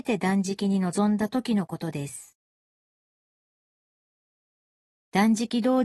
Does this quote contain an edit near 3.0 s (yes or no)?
no